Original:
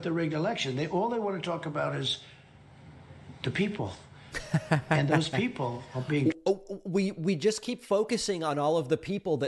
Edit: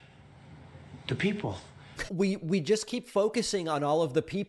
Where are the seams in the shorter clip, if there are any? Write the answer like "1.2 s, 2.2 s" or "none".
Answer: 2.1 s